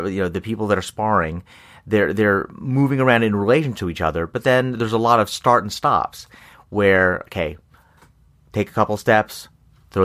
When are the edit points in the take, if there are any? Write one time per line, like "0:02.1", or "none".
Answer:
none

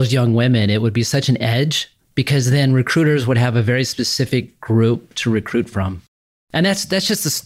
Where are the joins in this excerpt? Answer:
none

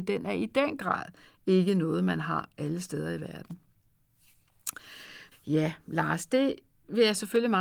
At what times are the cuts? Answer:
0:05.3

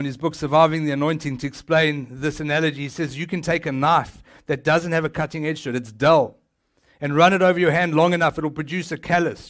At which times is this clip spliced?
none

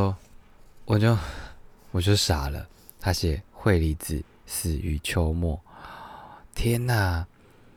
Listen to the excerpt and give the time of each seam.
0:03.5

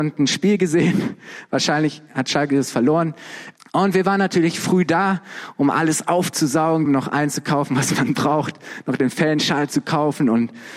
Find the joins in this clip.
0:03.6
0:06.9

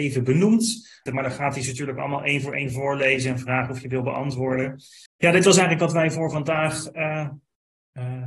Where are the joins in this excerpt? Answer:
0:01.1
0:05.1

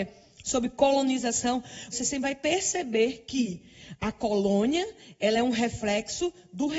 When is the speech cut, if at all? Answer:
0:01.9

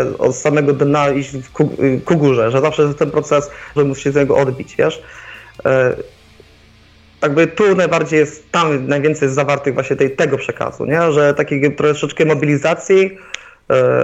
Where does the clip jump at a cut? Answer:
0:03.8

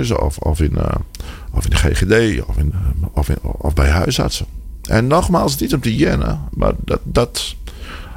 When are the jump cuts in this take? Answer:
0:02.7

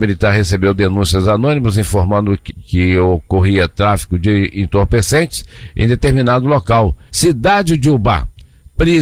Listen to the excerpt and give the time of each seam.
0:02.5
0:07.1

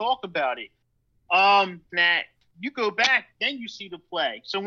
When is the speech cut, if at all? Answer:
0:01.9

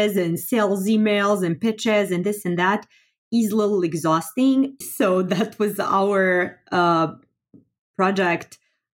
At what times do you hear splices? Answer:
0:04.8

